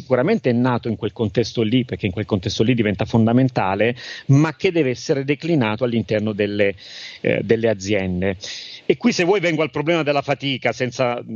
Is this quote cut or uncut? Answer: uncut